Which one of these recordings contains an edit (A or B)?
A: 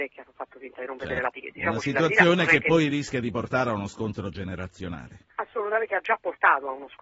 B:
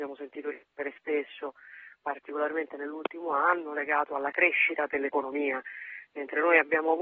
A